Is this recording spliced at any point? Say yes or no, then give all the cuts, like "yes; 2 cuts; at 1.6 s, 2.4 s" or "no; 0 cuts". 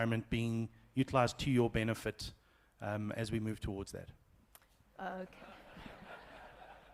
yes; 1 cut; at 4.8 s